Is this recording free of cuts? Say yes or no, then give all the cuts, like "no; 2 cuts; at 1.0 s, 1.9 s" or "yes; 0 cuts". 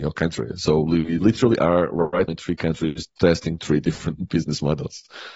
no; 1 cut; at 2.3 s